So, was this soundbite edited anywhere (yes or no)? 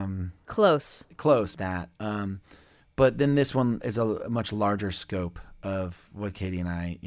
yes